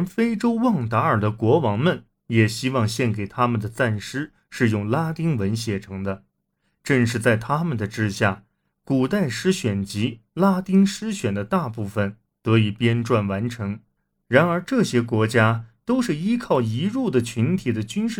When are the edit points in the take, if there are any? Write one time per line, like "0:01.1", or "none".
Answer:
none